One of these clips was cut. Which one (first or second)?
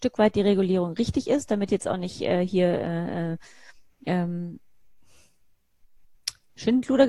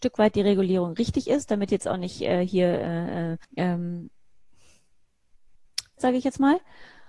second